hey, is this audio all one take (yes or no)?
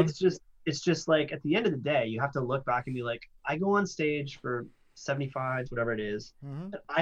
no